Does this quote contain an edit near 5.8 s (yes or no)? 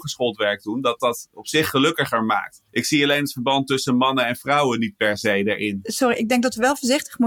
no